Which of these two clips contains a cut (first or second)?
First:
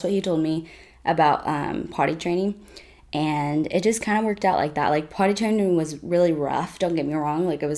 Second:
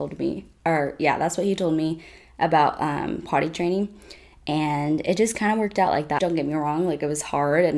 second